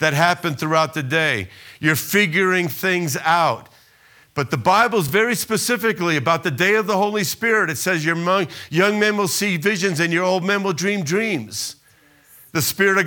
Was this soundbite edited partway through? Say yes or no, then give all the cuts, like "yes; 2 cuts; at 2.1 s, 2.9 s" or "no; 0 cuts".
no; 0 cuts